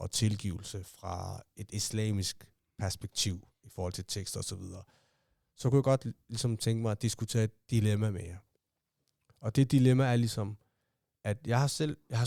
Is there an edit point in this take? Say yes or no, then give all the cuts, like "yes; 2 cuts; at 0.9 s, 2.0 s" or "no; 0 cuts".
no; 0 cuts